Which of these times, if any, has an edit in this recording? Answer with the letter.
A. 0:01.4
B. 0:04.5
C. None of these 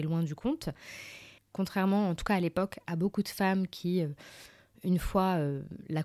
A